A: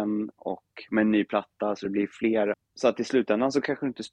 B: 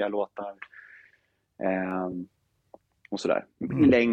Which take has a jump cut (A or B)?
A